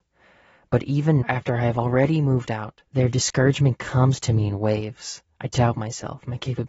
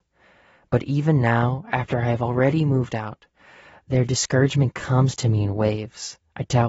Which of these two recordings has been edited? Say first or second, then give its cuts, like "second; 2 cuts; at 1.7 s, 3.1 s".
first; 2 cuts; at 1.2 s, 2.9 s